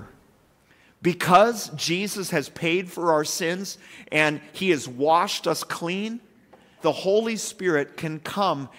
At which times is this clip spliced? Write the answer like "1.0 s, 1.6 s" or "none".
6.8 s